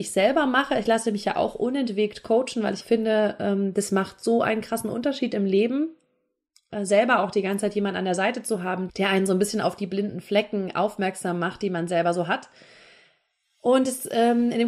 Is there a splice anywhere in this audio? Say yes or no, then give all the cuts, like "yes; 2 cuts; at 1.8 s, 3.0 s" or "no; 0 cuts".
yes; 2 cuts; at 2.8 s, 8.9 s